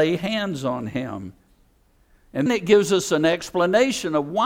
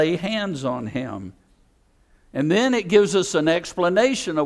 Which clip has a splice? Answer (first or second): first